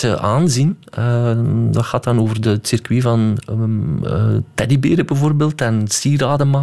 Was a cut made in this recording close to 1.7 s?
no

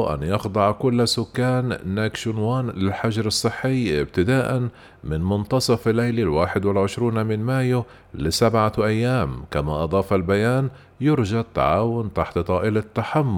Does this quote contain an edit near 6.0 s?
no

